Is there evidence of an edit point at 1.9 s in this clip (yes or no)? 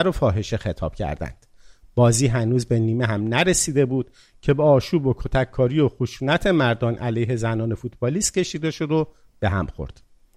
no